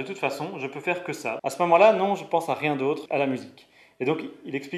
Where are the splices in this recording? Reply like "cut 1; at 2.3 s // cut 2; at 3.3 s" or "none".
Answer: cut 1; at 1.4 s // cut 2; at 3.1 s